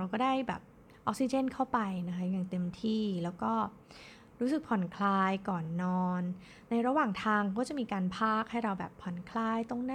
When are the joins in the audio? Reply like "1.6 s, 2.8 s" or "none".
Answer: none

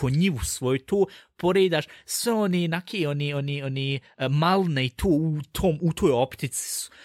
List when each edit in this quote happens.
none

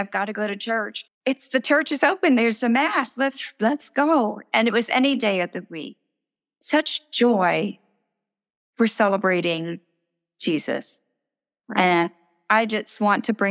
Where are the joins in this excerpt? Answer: 1.0 s

